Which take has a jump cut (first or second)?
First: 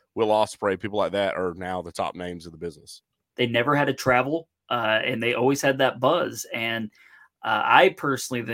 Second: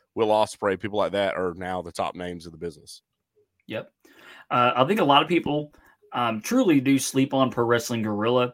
first